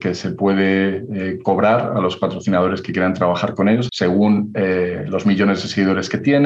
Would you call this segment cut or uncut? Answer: cut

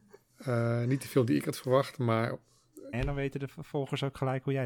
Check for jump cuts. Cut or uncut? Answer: cut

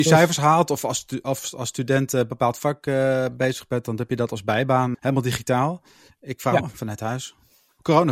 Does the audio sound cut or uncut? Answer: cut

